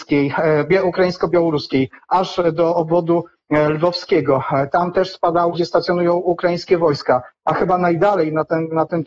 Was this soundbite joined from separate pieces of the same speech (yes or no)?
yes